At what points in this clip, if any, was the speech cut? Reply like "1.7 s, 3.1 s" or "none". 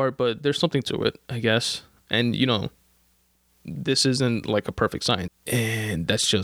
2.1 s, 5.3 s